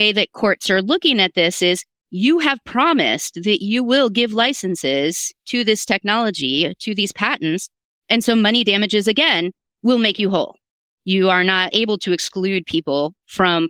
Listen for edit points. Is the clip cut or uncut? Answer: uncut